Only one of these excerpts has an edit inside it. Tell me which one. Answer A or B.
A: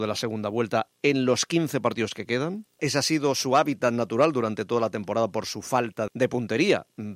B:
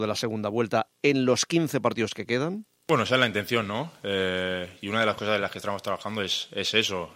A